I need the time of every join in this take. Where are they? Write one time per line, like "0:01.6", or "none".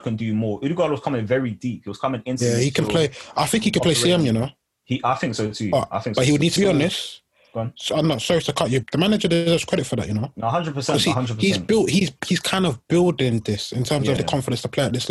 0:06.6
0:08.8
0:14.2